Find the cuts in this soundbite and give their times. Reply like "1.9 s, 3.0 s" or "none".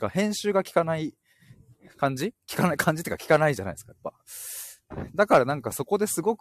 none